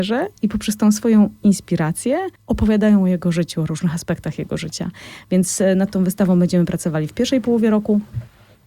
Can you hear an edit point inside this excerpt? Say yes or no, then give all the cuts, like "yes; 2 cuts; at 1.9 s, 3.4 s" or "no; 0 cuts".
yes; 1 cut; at 2.4 s